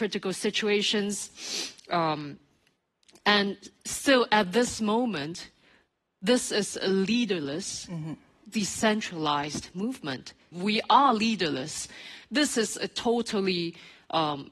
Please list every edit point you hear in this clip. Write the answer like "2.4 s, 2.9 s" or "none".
10.5 s, 12.2 s

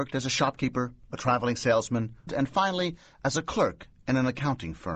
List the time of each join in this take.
2.3 s

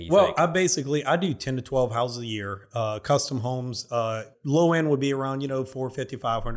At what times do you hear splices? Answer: 4.3 s

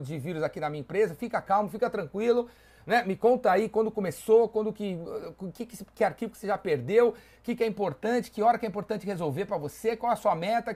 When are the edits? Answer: none

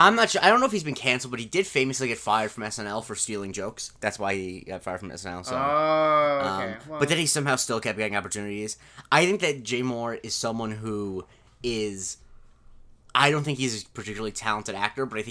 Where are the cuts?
none

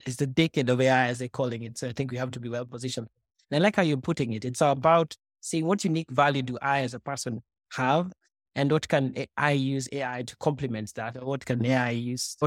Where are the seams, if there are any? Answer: none

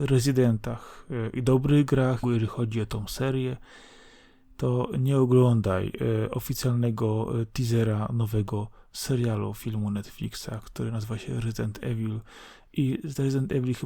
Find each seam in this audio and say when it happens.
2.2 s

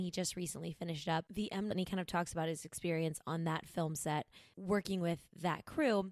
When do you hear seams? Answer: 1.7 s

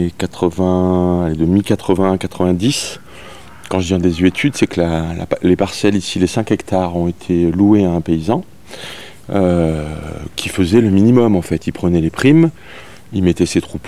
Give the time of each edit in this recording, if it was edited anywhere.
none

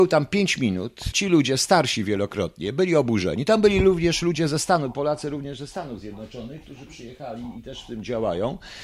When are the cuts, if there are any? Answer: 1.1 s

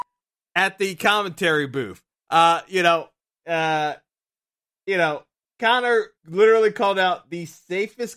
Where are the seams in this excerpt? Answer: 3.4 s, 6.1 s

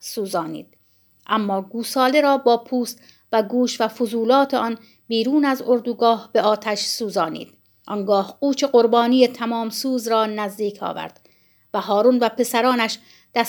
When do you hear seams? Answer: 7.8 s

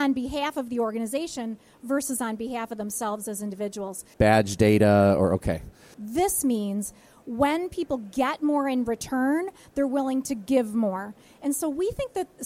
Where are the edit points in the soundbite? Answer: 4.1 s, 5.9 s

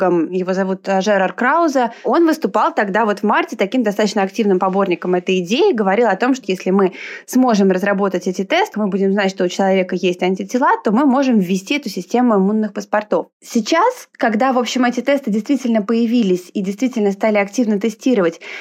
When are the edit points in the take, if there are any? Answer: 6.4 s, 8.7 s

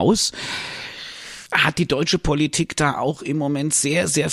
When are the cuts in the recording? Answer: 1.5 s

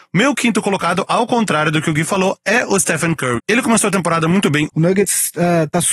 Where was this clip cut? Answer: 3.4 s, 4.7 s

